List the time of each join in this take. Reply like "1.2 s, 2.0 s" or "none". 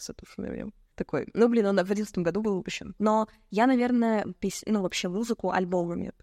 0.9 s, 3.0 s, 4.3 s